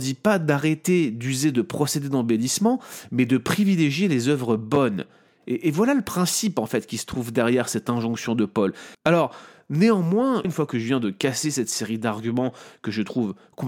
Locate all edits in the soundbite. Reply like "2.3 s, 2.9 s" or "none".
8.9 s, 10.4 s